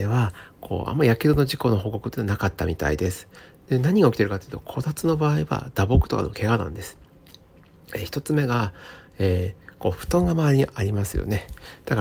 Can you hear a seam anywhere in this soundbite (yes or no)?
no